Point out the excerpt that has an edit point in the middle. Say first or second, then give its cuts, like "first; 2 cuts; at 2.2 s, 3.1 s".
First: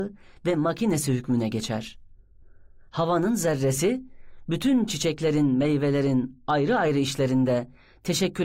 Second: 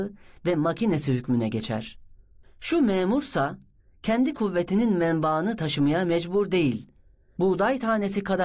second; 2 cuts; at 2.4 s, 7.4 s